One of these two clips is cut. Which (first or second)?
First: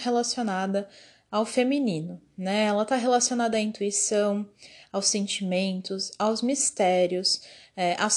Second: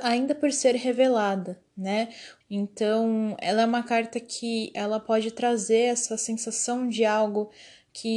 second